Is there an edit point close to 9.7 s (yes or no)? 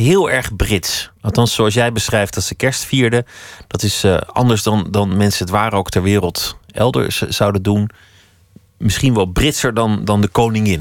no